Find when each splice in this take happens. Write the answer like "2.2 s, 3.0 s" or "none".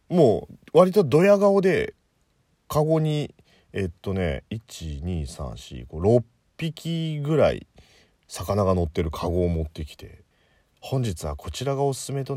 10.3 s